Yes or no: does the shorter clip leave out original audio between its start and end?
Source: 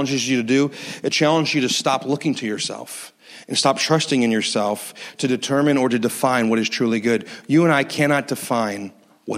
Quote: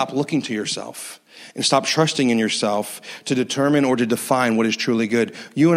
no